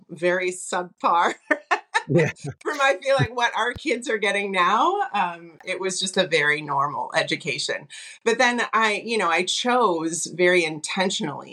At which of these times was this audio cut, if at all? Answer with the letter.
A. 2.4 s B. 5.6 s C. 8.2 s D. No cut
B